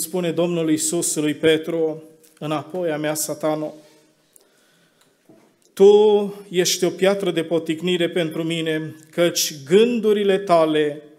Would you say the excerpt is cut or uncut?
uncut